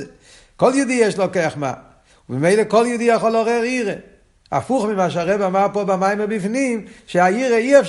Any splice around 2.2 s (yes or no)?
no